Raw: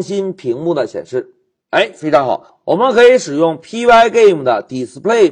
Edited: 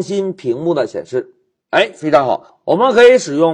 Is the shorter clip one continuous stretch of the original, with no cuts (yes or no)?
yes